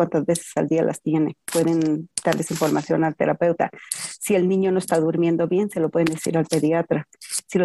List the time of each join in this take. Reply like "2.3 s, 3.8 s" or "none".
1.4 s